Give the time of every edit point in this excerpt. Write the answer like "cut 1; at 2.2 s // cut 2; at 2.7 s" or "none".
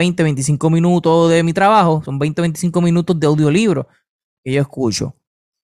none